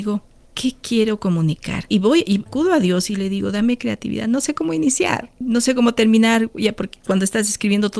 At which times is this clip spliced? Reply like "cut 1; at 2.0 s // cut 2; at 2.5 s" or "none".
none